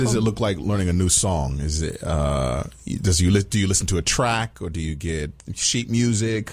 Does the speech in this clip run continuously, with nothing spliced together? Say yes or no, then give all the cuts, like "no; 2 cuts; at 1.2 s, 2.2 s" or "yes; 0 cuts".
yes; 0 cuts